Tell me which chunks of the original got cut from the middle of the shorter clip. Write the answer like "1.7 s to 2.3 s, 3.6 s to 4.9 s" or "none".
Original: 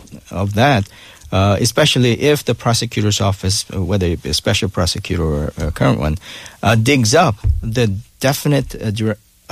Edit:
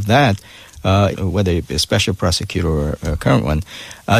1.6 s to 3.7 s